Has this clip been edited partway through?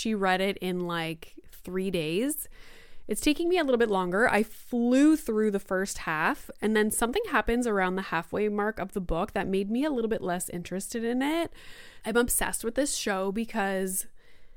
yes; 1 cut; at 12.0 s

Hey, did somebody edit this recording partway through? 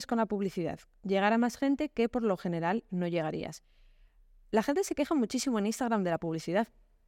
no; 0 cuts

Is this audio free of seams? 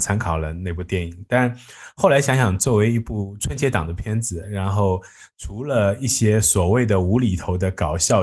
yes; 0 cuts

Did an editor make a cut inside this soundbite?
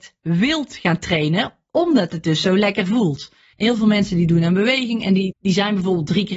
yes; 2 cuts; at 3.5 s, 5.3 s

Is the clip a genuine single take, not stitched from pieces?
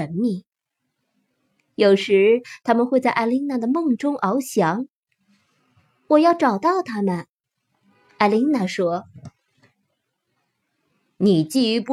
yes; 0 cuts

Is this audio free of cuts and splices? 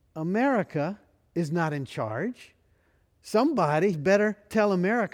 no; 1 cut; at 3.9 s

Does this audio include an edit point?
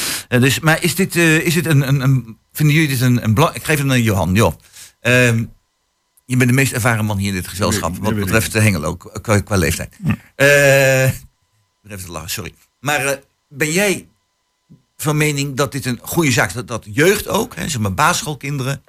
no; 0 cuts

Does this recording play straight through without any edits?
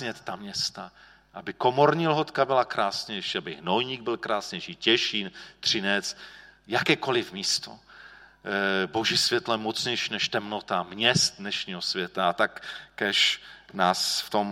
yes; 0 cuts

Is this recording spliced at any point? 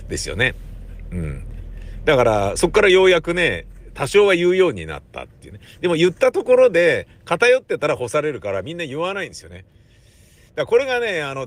no; 0 cuts

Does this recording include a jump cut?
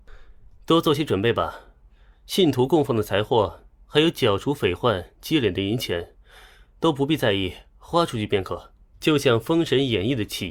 yes; 1 cut; at 8.9 s

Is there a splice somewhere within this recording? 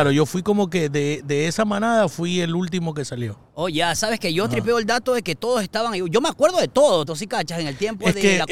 yes; 1 cut; at 7.1 s

